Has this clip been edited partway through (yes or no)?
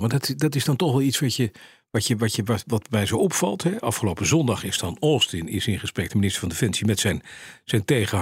no